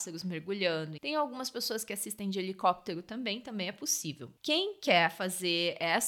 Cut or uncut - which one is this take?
cut